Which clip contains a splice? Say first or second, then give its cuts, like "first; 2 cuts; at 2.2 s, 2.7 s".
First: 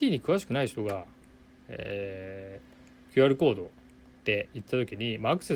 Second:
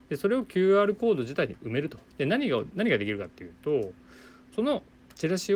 second; 2 cuts; at 2.1 s, 4.5 s